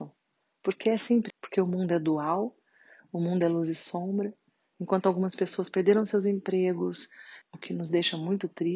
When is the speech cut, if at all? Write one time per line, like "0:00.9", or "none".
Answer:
0:01.3
0:07.4